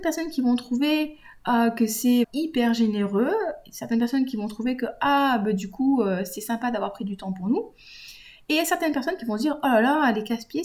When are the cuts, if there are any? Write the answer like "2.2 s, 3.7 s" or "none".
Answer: 2.2 s